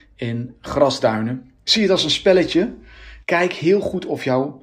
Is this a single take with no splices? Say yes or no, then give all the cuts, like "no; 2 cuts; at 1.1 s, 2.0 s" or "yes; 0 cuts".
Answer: no; 1 cut; at 3.2 s